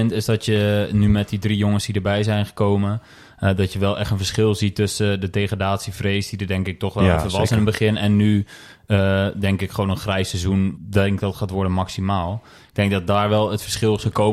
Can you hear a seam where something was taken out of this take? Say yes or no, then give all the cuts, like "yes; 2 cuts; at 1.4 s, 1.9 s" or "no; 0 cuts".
yes; 1 cut; at 10.7 s